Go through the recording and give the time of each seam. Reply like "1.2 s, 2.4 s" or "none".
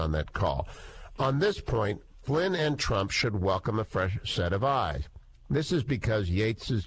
none